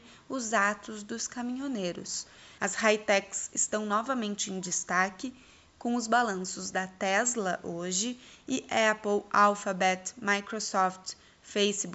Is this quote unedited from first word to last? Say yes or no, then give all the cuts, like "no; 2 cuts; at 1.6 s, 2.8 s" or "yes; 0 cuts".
no; 1 cut; at 2.6 s